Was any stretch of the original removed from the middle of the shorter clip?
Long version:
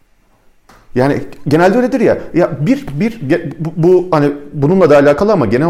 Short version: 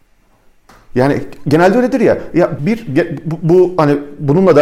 yes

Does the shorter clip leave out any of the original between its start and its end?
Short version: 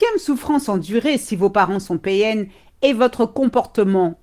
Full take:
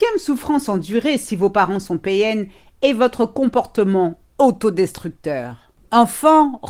no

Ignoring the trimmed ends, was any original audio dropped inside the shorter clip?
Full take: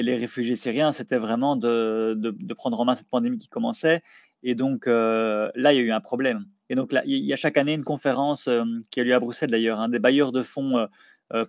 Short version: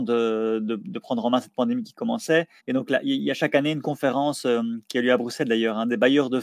yes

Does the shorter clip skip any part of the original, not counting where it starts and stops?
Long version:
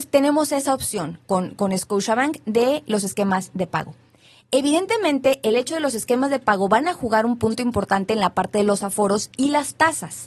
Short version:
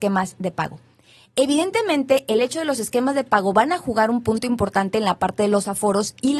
no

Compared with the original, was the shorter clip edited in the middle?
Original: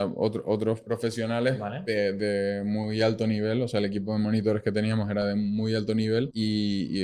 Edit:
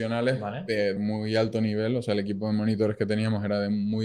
yes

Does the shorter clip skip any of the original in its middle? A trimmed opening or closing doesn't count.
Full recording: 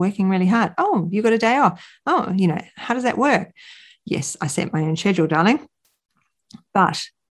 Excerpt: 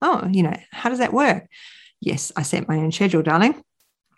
no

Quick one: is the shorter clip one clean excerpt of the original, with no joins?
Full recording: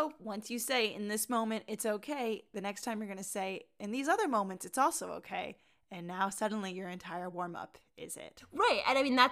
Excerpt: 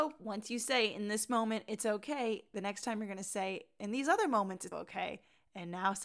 no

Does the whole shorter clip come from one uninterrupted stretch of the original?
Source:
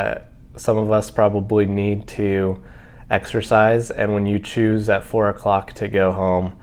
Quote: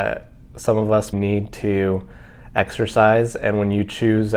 no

